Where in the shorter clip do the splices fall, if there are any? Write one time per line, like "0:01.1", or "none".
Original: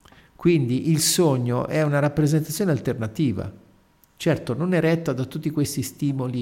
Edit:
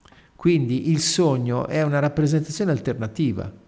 none